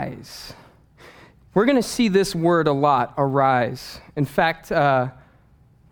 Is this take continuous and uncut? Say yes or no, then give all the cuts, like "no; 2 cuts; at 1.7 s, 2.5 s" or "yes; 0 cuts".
yes; 0 cuts